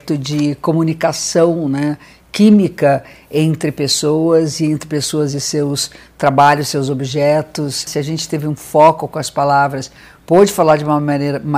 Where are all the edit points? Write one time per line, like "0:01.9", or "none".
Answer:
0:07.9